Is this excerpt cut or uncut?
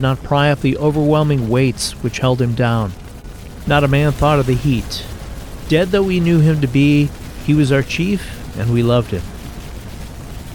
cut